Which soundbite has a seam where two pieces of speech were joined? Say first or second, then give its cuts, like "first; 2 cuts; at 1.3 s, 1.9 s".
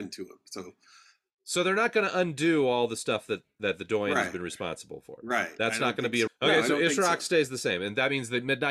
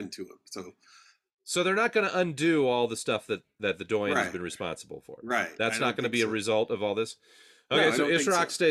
first; 1 cut; at 6.3 s